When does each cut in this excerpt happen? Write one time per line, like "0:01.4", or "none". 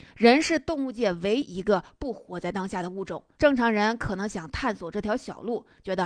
0:01.4
0:03.4